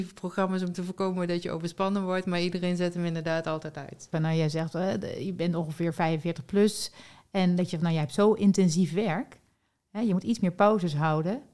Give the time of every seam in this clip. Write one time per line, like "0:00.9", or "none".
0:04.1